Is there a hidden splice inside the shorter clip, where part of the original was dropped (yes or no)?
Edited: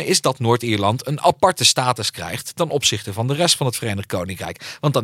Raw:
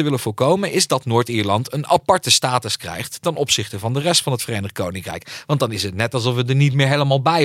no